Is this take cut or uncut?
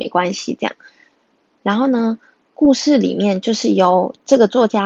uncut